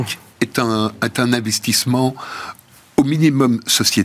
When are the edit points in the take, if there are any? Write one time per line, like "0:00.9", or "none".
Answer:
none